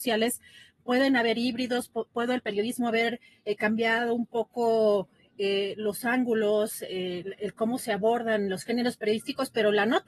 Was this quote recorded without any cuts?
yes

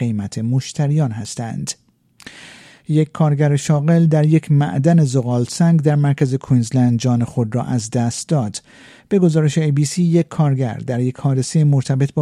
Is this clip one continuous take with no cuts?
yes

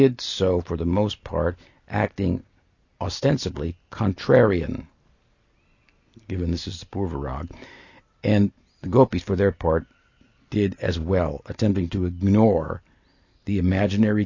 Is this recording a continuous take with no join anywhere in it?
yes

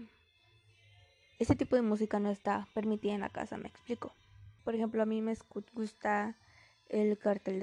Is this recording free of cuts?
no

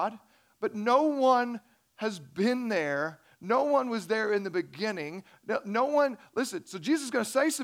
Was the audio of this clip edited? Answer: no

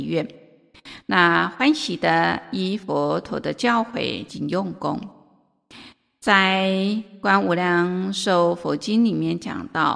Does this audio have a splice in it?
yes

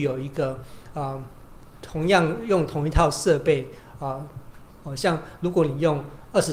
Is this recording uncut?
no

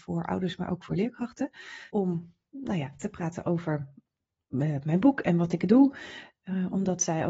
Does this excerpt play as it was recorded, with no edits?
no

